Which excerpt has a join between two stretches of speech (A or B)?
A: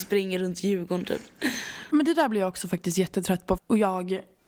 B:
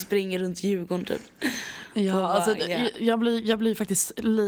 A